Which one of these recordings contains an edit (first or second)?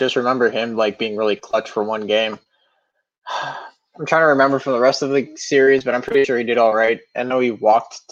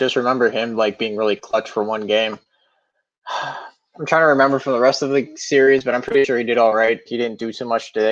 second